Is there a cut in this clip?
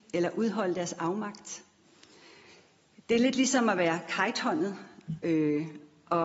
no; 0 cuts

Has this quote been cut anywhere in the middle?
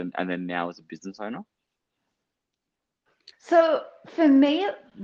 yes; 1 cut; at 3.3 s

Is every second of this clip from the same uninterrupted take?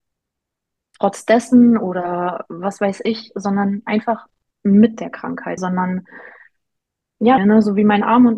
no; 2 cuts; at 5.6 s, 7.4 s

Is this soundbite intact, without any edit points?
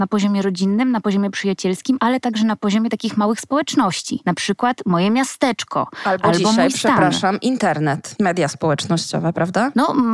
yes; 0 cuts

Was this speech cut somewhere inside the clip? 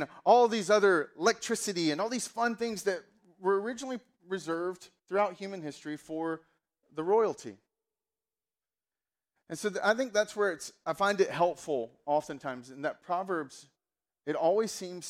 yes; 1 cut; at 5.0 s

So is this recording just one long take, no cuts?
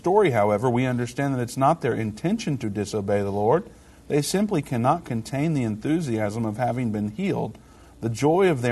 yes; 0 cuts

